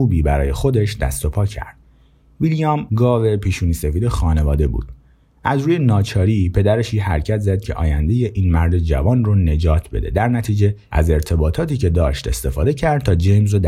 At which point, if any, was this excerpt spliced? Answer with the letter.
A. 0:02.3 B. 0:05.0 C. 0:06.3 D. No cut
D